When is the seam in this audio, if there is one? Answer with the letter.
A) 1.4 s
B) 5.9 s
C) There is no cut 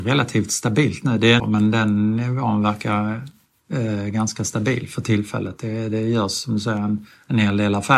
A